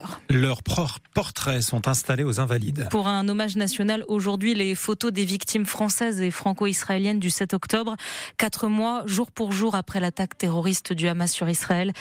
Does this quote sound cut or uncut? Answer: uncut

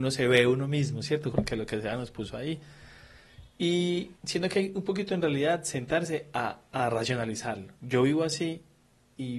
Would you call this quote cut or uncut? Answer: cut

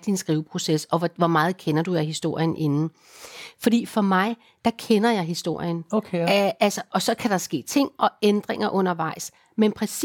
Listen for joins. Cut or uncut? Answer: uncut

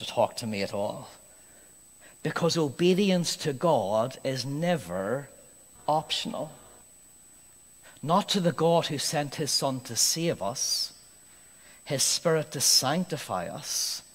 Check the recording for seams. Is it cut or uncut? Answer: uncut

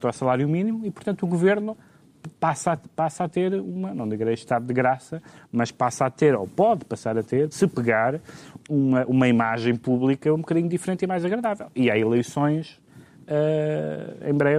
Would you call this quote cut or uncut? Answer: cut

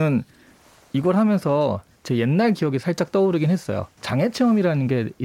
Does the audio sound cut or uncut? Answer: cut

